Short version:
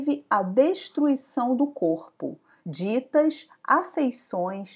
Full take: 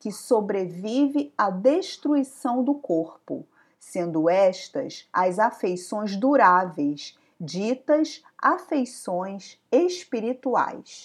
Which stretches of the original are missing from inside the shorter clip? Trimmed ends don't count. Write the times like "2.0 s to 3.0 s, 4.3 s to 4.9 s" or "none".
3.7 s to 7.3 s